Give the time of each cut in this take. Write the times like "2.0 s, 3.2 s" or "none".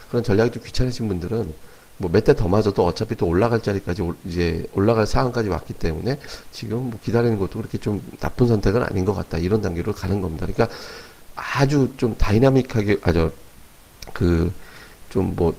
none